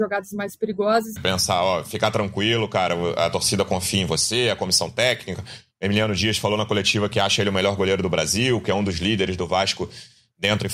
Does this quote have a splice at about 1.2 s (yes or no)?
yes